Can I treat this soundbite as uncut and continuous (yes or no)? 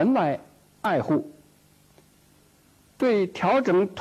yes